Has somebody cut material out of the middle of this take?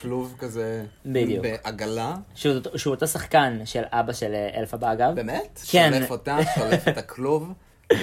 yes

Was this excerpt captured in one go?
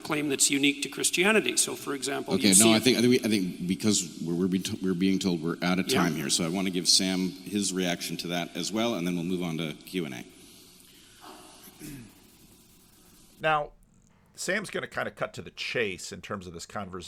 yes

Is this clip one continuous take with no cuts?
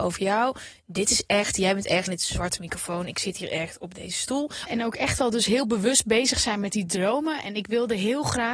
no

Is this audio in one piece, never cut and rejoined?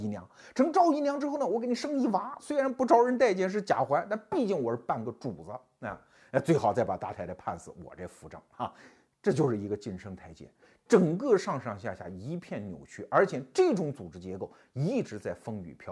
yes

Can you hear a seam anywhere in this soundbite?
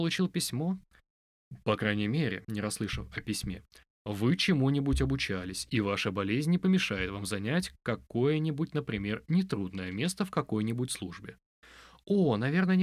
yes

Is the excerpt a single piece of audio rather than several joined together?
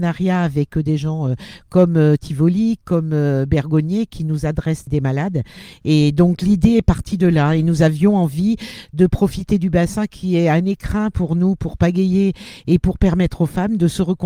no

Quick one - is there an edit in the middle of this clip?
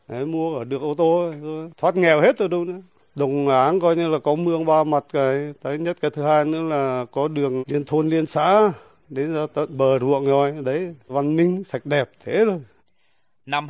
yes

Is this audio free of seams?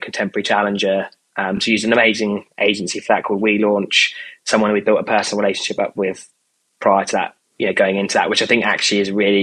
yes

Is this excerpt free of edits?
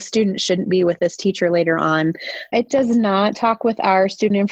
no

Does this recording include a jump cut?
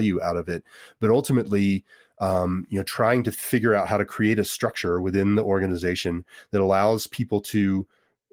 no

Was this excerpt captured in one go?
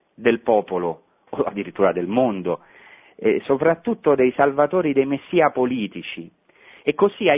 yes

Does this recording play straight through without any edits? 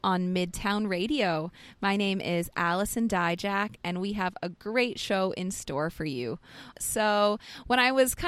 no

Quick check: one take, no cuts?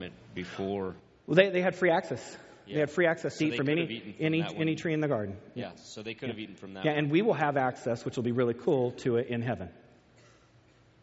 yes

